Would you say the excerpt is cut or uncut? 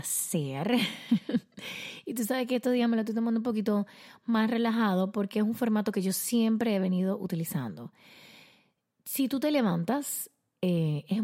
uncut